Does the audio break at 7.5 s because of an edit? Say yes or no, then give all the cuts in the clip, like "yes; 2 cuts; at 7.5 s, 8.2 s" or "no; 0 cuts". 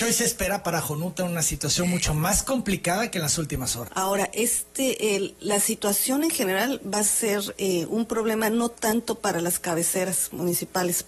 no; 1 cut; at 3.9 s